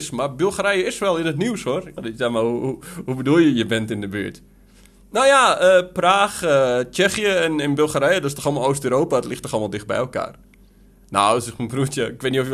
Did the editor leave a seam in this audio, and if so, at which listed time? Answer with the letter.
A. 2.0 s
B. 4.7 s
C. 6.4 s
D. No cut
A